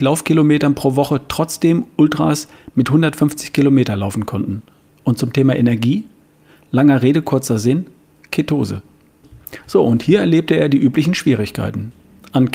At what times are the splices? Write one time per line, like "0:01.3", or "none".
none